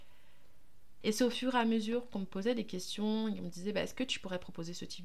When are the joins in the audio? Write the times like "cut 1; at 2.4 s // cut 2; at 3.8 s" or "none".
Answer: cut 1; at 1.0 s